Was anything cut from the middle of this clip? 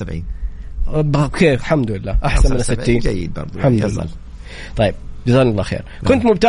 no; 0 cuts

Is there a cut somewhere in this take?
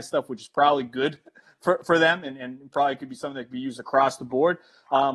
no; 0 cuts

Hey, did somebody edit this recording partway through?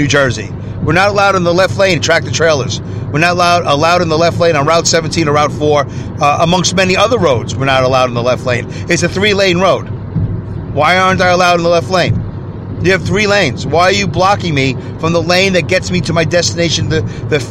no; 0 cuts

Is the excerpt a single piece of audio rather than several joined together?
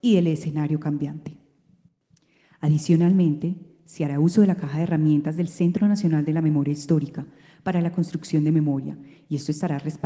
yes; 0 cuts

